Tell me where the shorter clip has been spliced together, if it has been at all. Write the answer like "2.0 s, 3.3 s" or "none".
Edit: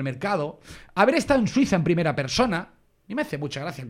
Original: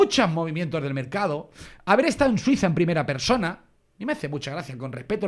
none